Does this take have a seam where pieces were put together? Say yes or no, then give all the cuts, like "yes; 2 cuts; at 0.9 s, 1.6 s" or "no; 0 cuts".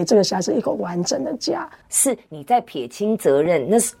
yes; 1 cut; at 1.8 s